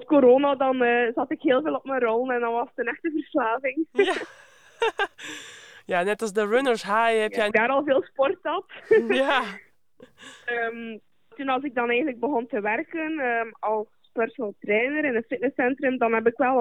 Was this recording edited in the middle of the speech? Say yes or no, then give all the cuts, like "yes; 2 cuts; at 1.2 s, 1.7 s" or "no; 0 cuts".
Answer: yes; 2 cuts; at 7.5 s, 11.3 s